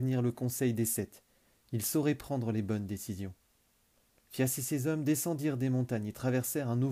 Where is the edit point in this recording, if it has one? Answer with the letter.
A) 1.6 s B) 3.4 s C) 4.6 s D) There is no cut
D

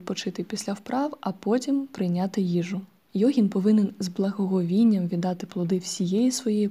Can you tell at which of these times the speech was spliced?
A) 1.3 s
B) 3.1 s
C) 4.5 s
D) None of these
B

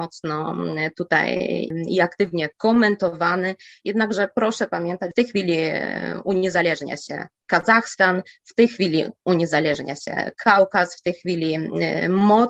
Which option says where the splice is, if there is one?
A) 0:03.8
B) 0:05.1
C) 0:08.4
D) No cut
B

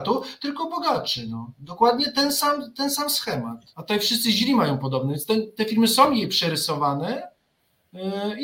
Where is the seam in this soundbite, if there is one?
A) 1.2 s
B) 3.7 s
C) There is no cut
B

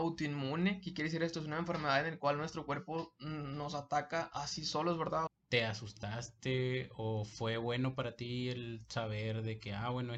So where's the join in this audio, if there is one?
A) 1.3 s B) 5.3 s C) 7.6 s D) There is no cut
B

